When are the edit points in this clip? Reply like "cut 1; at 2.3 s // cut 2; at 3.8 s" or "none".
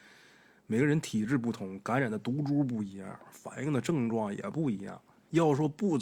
none